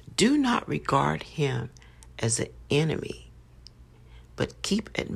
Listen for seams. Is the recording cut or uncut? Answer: uncut